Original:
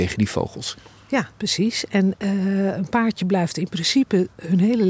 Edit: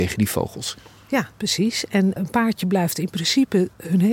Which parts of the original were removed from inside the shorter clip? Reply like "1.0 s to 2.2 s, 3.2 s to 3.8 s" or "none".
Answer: 2.2 s to 2.8 s